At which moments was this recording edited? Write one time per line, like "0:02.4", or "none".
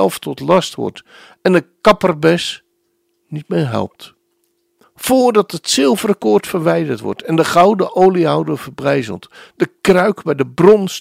0:04.8